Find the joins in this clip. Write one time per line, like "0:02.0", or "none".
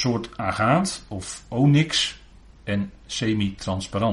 0:02.6

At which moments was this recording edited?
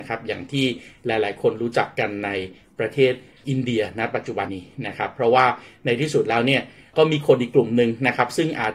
0:04.5

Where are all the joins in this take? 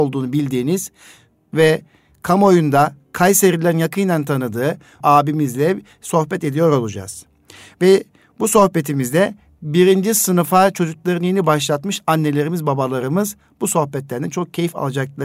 0:05.0

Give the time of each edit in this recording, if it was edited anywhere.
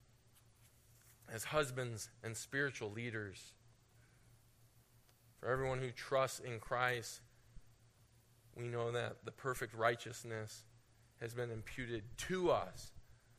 none

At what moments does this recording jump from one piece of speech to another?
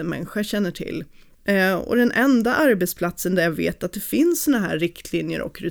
0:01.4

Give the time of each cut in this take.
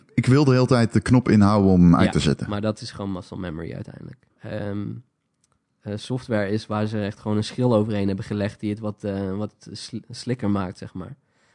0:04.3

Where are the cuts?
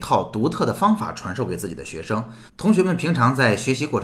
0:02.5

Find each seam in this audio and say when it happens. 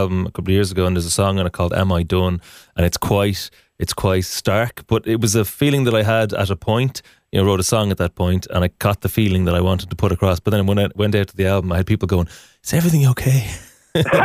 none

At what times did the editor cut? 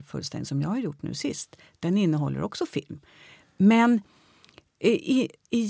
none

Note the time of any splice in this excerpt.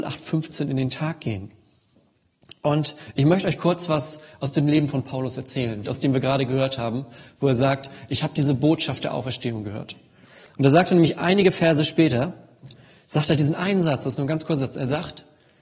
0:05.8

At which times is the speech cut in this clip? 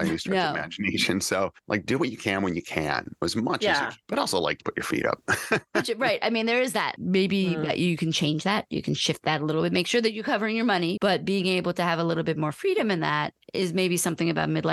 0:07.0
0:11.0

